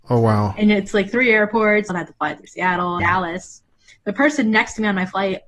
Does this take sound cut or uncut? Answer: cut